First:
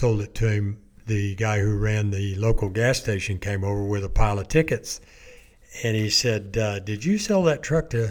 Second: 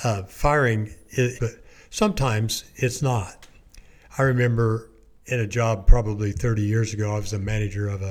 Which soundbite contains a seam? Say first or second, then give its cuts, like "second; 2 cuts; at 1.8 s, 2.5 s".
second; 1 cut; at 1.4 s